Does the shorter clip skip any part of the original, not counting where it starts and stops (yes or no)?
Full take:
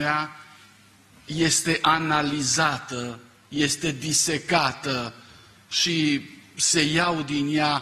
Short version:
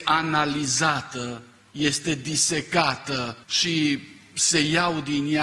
yes